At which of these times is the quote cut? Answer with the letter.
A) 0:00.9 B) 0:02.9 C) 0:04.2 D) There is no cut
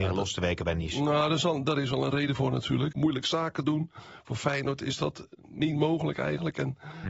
B